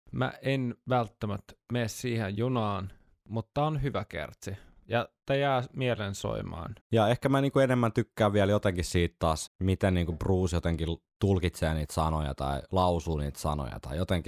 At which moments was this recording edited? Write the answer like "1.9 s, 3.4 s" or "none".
6.8 s, 9.5 s